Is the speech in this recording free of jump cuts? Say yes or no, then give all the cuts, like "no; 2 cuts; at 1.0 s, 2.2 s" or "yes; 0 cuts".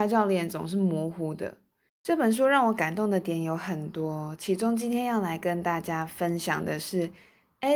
no; 1 cut; at 1.9 s